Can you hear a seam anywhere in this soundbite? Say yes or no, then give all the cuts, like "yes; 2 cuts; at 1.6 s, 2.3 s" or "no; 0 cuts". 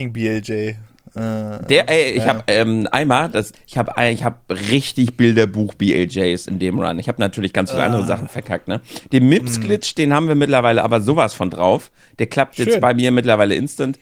yes; 1 cut; at 3.5 s